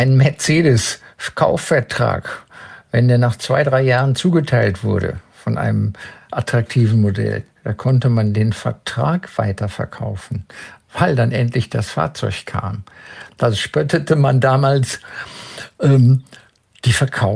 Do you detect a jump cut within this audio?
no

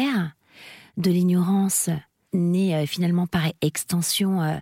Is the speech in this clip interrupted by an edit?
yes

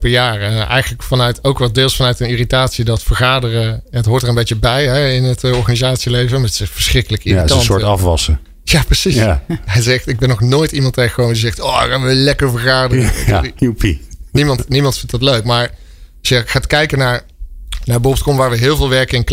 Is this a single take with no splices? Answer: no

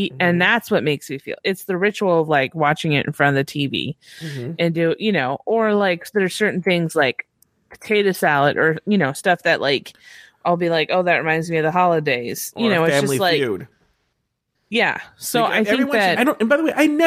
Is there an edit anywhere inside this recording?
yes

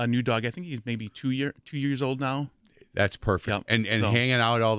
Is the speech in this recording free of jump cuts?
yes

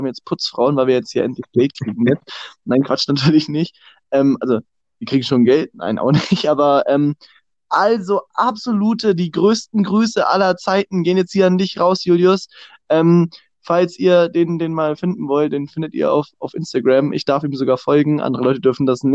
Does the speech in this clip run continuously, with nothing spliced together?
yes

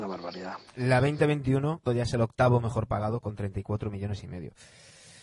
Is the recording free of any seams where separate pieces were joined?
no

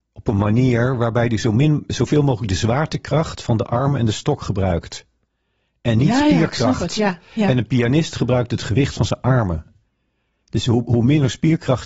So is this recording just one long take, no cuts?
yes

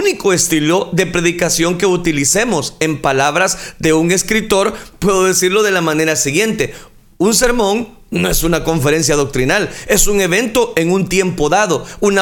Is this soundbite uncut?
yes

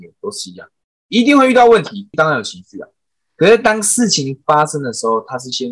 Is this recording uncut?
no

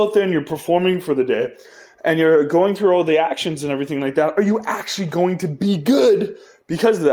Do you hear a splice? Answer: no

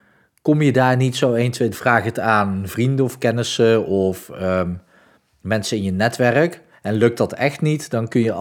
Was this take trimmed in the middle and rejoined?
yes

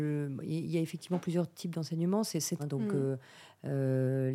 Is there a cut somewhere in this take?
yes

